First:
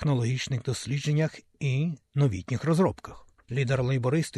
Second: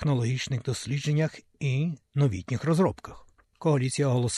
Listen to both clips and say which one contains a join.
second; 1 cut; at 3.4 s

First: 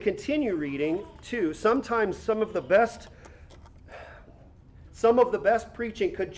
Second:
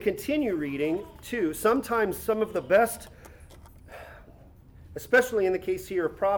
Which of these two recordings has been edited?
first; 1 cut; at 4.9 s

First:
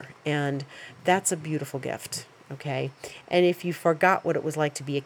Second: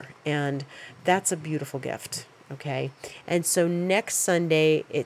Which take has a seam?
second; 1 cut; at 3.2 s

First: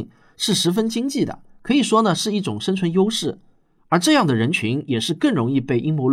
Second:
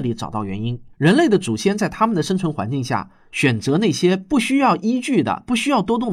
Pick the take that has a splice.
second; 1 cut; at 0.9 s

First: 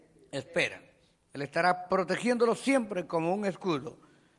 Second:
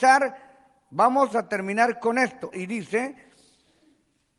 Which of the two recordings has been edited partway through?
second; 2 cuts; at 1.3 s, 2.5 s

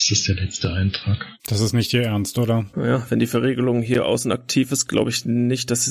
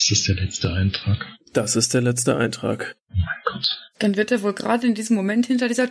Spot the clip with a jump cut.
first; 1 cut; at 1.4 s

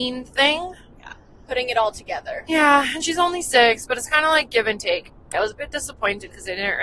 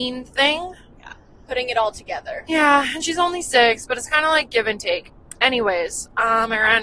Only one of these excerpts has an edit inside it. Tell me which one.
first; 1 cut; at 5.3 s

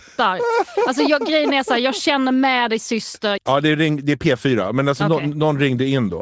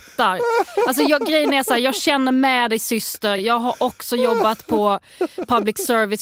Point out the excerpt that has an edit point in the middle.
first; 1 cut; at 3.4 s

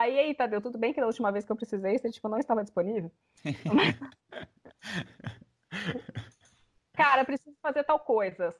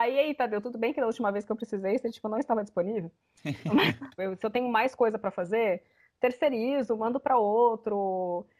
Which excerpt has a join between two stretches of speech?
second; 1 cut; at 4.2 s

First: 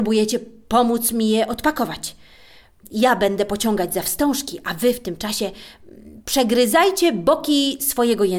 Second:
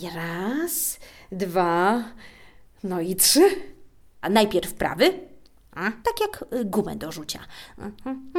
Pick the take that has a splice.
second; 2 cuts; at 4.2 s, 6.0 s

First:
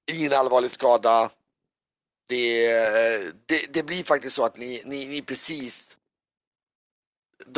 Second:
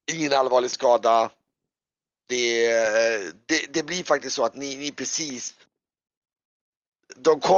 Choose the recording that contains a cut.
second; 1 cut; at 4.5 s

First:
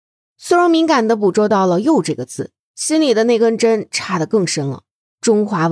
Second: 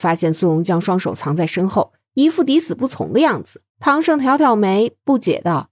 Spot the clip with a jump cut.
second; 1 cut; at 3.7 s

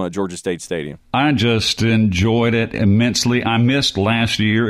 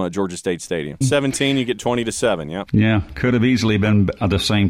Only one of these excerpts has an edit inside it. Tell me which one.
second; 1 cut; at 1.0 s

